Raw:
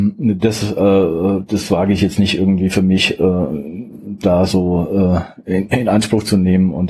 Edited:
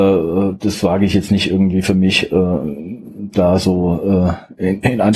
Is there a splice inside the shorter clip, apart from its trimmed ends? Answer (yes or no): no